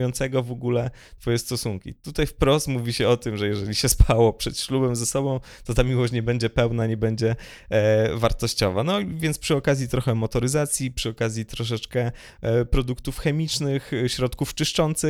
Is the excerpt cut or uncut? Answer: uncut